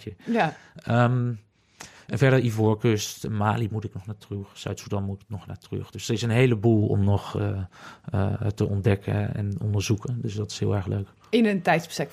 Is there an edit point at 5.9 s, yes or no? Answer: no